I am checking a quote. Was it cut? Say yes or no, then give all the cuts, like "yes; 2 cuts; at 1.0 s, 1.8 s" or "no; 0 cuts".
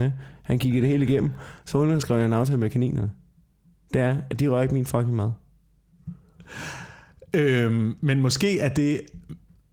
no; 0 cuts